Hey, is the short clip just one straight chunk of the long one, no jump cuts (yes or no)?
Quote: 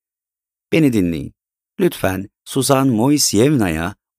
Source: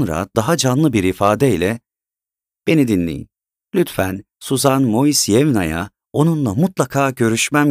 yes